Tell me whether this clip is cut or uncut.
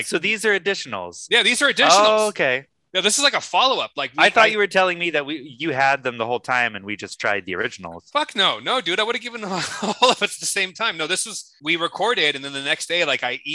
uncut